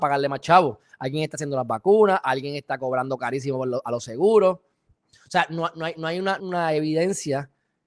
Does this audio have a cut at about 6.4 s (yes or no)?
yes